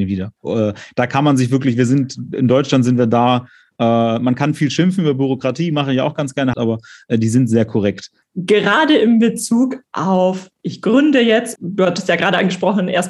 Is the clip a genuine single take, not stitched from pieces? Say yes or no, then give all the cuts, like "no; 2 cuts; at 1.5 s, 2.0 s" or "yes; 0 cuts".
no; 3 cuts; at 6.5 s, 8.2 s, 11.6 s